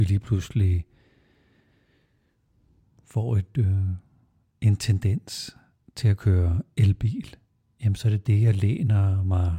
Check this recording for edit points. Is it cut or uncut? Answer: uncut